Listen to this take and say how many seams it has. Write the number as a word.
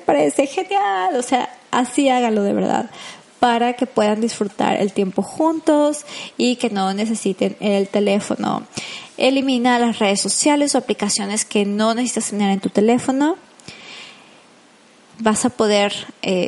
one